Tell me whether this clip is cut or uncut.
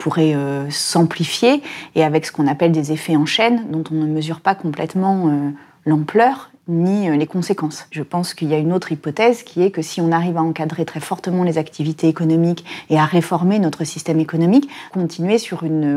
cut